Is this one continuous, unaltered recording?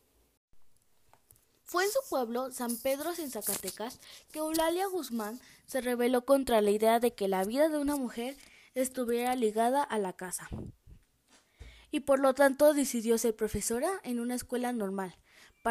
yes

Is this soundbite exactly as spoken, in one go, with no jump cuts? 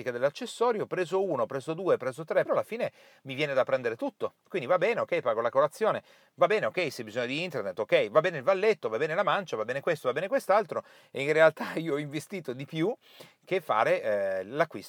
no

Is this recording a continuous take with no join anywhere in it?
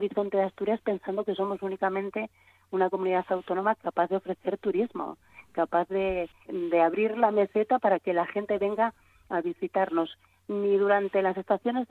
no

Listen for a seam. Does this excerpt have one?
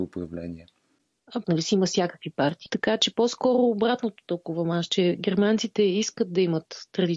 yes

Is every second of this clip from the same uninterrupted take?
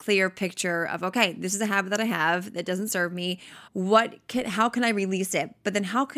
no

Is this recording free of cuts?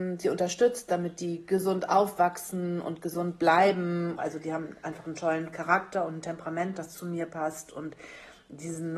no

